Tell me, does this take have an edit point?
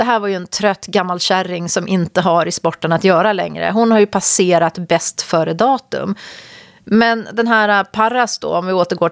no; 0 cuts

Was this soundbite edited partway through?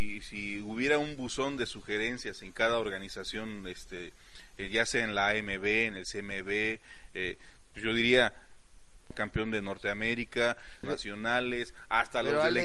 yes; 2 cuts; at 9.1 s, 10.8 s

